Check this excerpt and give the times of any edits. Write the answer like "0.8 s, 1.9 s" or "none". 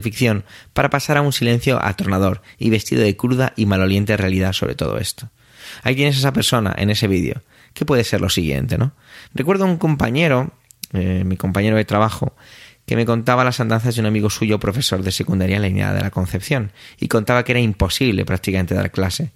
9.2 s